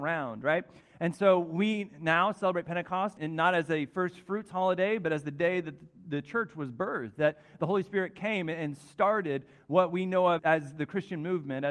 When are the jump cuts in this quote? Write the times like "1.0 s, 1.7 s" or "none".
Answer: 3.2 s, 10.4 s